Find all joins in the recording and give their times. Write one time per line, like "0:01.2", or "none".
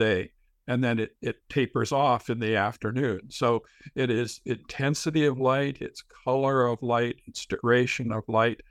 none